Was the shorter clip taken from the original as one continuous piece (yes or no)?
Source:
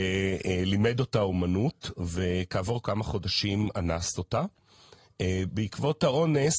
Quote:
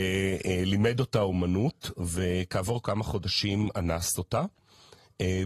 yes